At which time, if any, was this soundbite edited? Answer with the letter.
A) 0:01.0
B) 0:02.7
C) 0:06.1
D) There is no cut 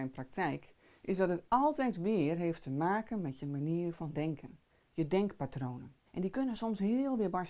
C